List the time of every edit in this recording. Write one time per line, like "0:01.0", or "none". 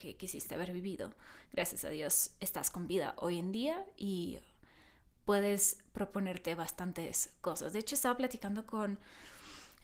none